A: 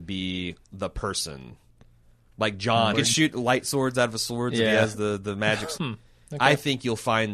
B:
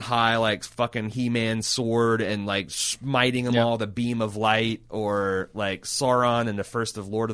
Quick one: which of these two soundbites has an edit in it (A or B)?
A